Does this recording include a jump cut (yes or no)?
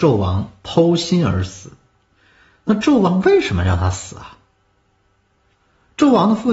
no